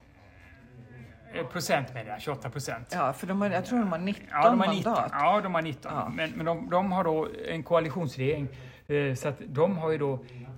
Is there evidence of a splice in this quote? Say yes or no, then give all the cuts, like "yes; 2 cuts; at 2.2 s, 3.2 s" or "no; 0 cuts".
no; 0 cuts